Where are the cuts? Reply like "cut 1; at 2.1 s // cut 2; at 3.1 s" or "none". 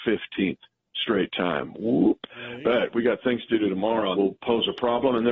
cut 1; at 4.1 s